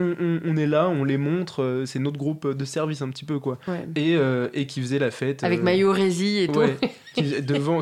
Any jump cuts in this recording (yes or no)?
no